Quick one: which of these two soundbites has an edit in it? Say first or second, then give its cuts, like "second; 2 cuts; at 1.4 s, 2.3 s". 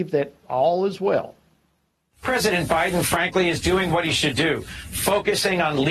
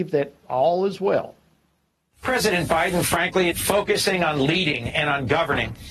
second; 1 cut; at 3.5 s